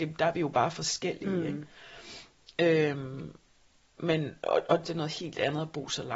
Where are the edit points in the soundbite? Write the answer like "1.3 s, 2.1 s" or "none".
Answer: 4.8 s

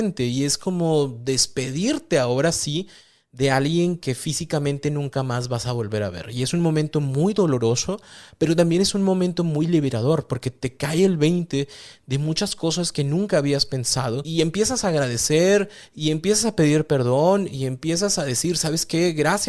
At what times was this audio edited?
none

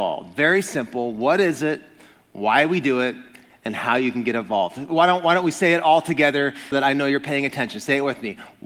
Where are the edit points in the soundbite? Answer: 6.7 s

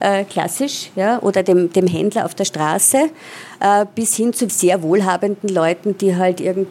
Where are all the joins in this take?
4.5 s

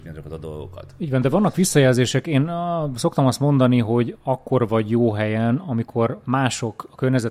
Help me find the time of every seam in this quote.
none

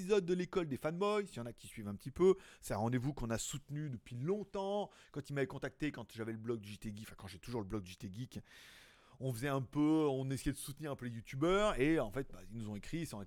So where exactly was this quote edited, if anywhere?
none

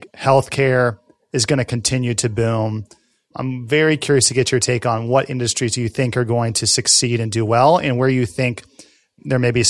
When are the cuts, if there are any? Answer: none

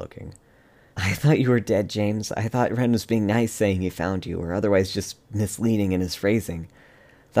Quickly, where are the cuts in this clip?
0.9 s

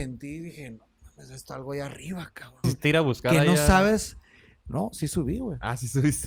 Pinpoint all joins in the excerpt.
2.6 s

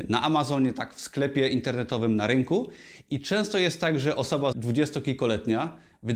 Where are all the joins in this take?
4.5 s

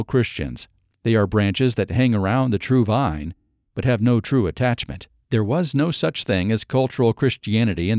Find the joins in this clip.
none

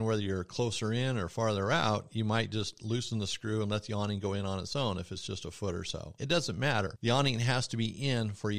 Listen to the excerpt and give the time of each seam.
6.2 s

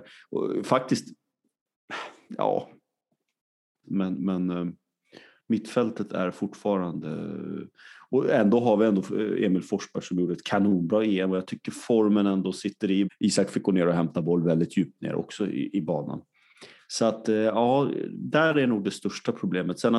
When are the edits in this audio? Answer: 3.8 s, 13.1 s

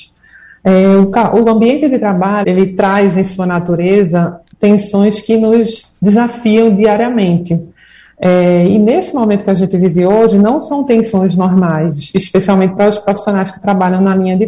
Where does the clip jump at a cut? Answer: 2.4 s

